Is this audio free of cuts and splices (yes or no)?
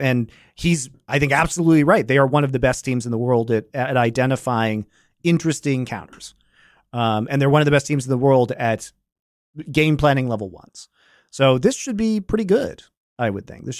yes